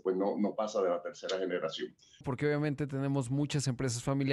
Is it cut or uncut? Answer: cut